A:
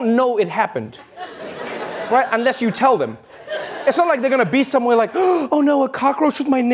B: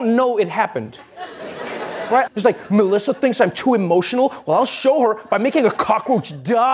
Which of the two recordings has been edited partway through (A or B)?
B